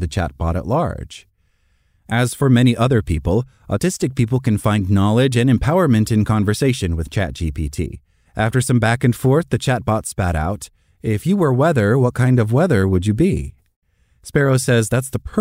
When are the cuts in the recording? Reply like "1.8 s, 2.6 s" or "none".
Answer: 8.3 s